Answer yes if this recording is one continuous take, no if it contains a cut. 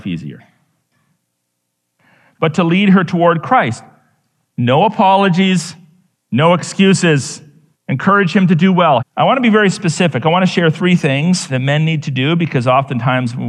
no